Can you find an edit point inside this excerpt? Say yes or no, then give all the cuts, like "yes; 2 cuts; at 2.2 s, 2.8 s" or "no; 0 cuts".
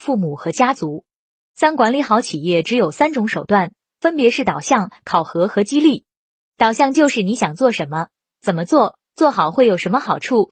no; 0 cuts